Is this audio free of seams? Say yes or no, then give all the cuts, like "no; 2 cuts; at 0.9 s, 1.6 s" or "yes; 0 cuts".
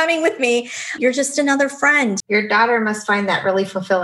no; 2 cuts; at 1.0 s, 2.2 s